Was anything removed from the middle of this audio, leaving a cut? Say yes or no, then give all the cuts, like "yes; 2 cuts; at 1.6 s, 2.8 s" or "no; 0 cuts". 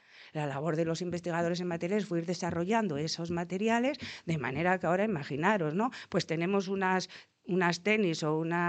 no; 0 cuts